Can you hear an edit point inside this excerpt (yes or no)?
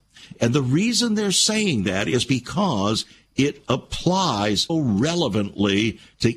yes